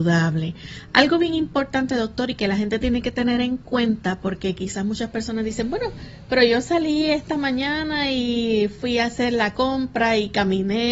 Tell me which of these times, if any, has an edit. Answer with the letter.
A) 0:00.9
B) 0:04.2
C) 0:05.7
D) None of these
D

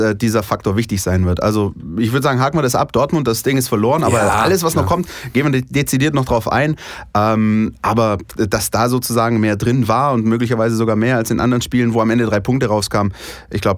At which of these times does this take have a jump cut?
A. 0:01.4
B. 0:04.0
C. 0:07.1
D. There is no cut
D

